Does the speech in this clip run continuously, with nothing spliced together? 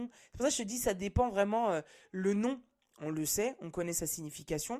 yes; 0 cuts

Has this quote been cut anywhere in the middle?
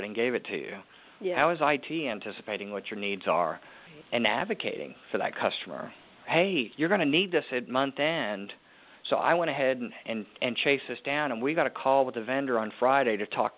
no; 0 cuts

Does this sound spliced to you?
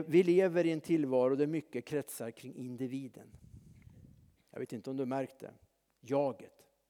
no; 0 cuts

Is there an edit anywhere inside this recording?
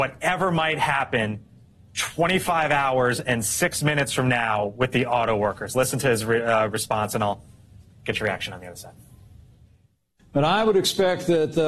no; 0 cuts

